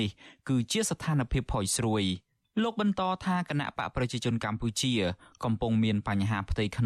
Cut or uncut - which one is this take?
uncut